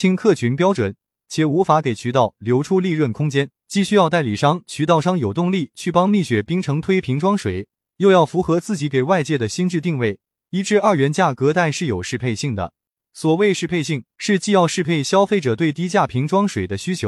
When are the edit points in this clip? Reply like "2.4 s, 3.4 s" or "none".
3.6 s